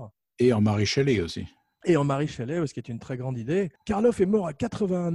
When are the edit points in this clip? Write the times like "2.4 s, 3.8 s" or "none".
3.8 s

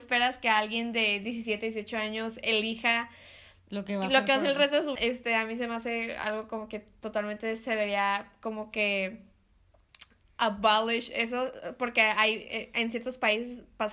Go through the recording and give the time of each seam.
5.0 s

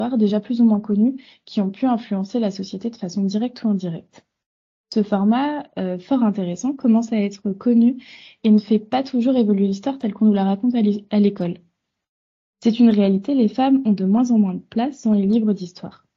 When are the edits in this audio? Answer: none

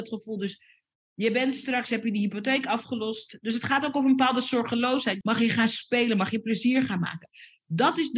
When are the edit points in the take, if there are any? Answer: 5.2 s

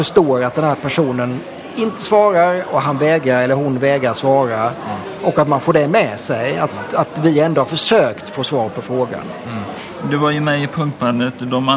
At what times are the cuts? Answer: none

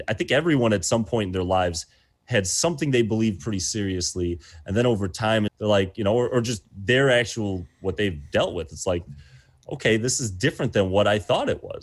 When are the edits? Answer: 5.5 s

